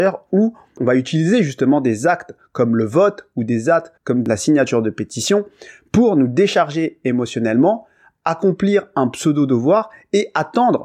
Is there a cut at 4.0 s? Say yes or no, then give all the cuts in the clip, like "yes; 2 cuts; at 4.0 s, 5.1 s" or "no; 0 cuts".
yes; 1 cut; at 4.0 s